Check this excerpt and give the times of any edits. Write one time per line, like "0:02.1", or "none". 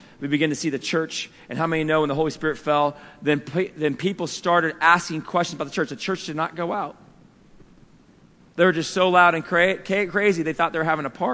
none